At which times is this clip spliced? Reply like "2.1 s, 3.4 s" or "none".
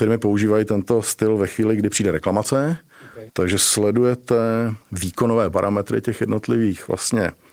3.3 s, 4.8 s